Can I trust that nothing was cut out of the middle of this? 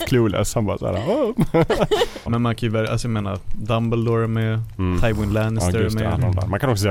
no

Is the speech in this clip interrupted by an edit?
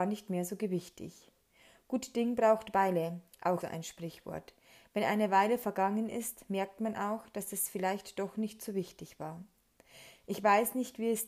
yes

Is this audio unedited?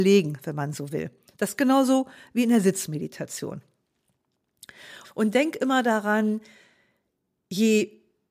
no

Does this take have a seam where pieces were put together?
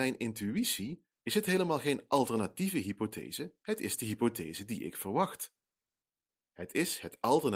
yes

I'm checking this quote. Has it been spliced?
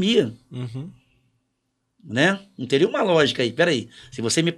no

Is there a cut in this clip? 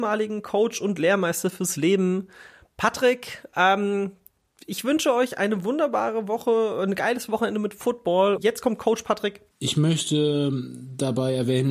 yes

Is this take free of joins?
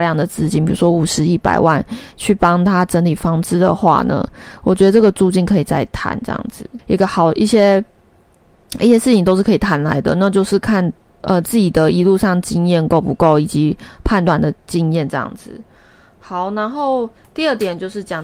no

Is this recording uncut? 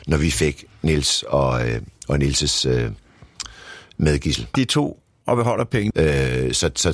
no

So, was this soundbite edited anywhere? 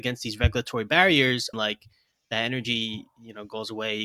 yes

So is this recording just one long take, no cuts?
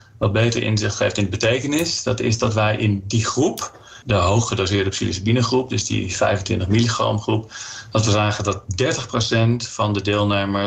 no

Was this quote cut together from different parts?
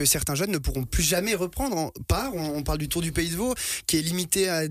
no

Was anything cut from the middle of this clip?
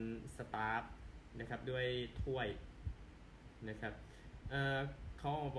no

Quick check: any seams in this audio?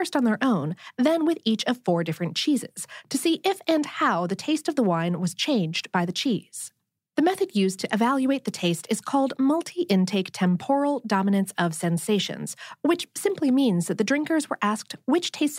no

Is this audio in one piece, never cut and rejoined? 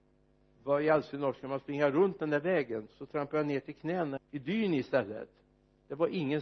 no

